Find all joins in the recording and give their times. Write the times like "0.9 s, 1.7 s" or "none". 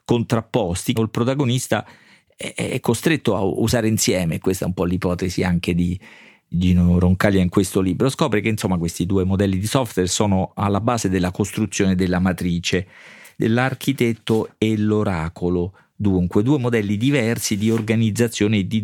1.0 s